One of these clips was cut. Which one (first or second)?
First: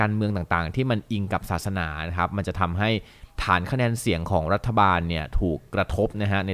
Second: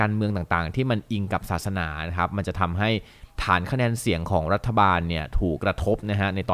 second